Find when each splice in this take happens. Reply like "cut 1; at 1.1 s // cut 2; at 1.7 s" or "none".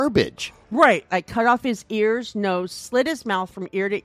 cut 1; at 1.1 s